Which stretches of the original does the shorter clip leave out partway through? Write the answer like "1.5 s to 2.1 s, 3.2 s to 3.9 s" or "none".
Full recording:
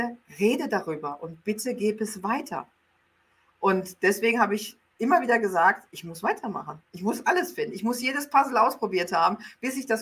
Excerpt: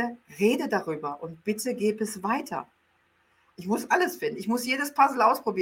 3.5 s to 6.9 s